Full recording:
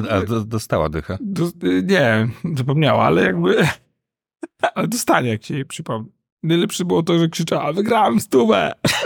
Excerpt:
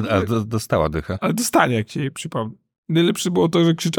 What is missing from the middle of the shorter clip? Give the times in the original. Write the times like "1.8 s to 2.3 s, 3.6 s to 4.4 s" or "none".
1.2 s to 4.7 s